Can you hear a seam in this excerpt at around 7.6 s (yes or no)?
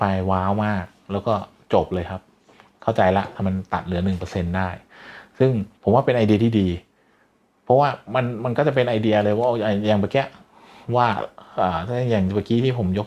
no